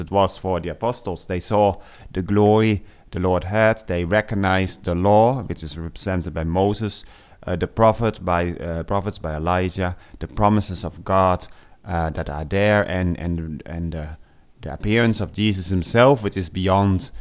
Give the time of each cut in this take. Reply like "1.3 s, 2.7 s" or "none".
none